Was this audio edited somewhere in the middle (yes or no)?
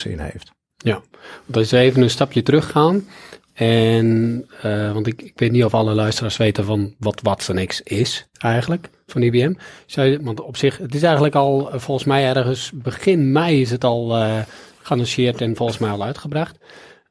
no